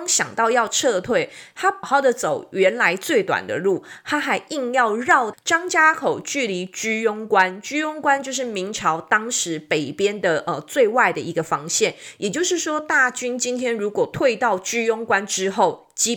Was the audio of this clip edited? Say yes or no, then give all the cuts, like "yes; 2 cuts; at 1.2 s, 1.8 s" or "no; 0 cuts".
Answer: yes; 2 cuts; at 1.8 s, 5.3 s